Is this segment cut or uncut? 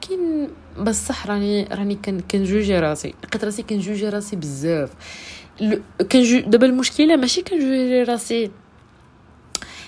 uncut